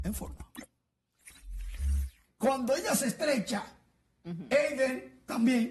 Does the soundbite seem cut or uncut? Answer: cut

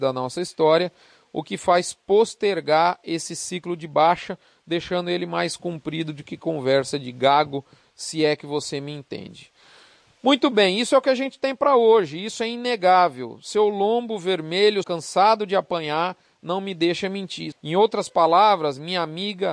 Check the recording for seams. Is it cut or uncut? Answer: cut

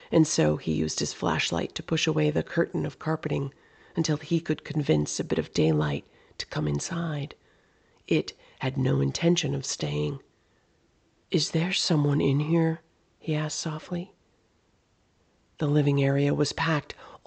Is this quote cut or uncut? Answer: cut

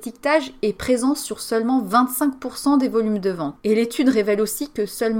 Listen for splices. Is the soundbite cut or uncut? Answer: cut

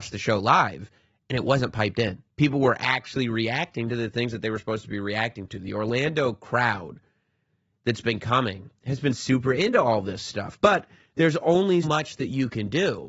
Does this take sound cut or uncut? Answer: cut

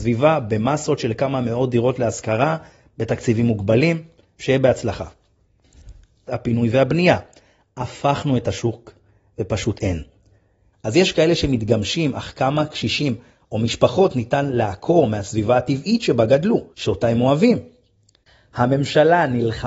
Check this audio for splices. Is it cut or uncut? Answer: cut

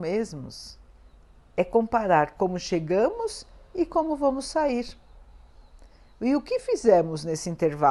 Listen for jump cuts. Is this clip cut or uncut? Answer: uncut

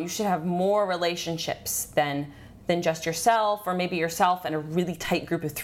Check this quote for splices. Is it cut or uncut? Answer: uncut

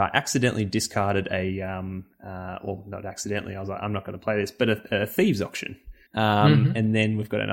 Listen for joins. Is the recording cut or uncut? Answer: cut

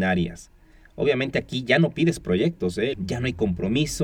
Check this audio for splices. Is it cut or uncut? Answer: cut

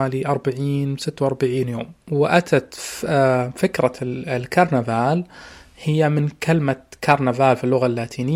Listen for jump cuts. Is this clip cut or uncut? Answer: cut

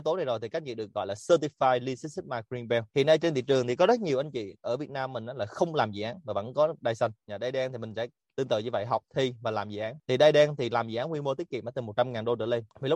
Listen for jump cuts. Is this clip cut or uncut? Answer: cut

